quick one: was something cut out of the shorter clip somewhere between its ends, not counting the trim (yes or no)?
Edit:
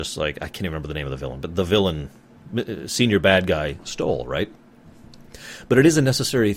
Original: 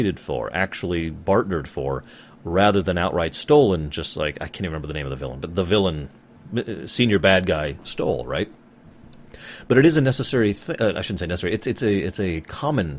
no